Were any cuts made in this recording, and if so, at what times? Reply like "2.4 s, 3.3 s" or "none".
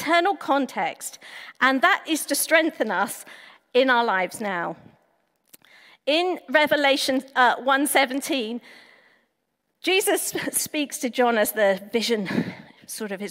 none